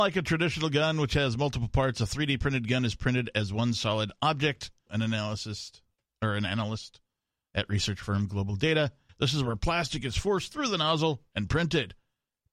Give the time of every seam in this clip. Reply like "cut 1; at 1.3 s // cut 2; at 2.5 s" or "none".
cut 1; at 4.9 s // cut 2; at 9.1 s